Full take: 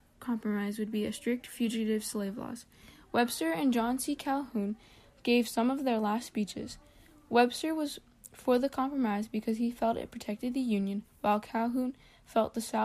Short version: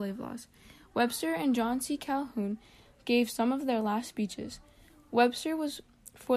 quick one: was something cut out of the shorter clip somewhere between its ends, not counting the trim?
no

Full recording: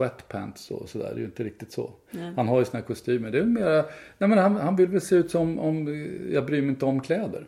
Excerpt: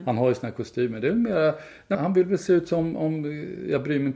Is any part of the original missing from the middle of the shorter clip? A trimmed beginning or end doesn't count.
yes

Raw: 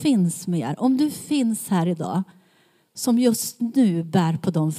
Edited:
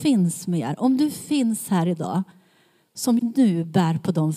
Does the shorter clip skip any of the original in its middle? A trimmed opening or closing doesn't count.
yes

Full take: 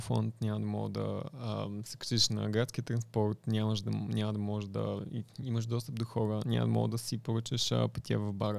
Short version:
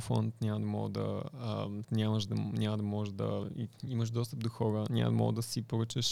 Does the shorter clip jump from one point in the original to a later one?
yes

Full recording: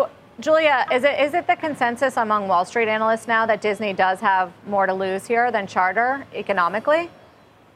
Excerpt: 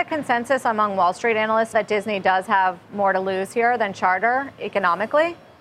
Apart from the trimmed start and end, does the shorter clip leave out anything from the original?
yes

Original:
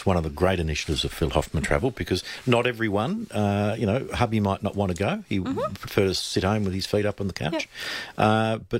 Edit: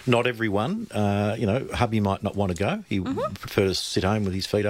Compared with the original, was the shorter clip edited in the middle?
no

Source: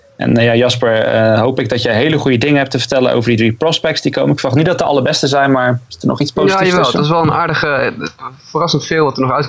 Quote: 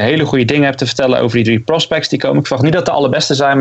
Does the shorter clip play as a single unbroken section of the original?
yes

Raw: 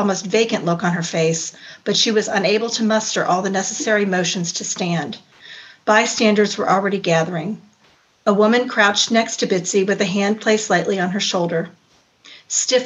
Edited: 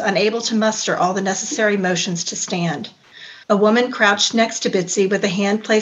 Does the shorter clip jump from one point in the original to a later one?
yes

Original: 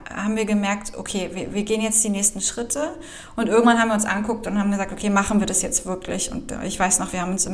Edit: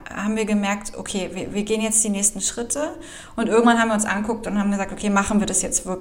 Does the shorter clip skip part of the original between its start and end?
no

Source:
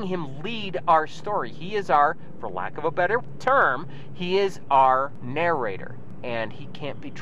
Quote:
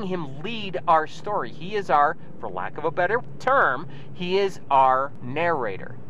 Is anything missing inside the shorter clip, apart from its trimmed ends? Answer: no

